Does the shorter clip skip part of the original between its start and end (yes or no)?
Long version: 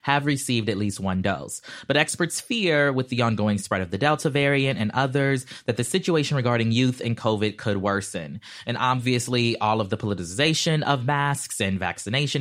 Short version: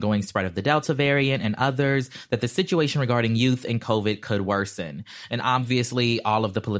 no